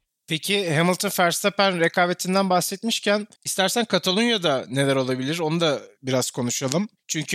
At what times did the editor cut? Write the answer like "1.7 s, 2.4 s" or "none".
3.4 s